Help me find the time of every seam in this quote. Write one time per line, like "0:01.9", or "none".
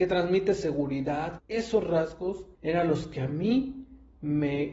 0:01.4
0:02.5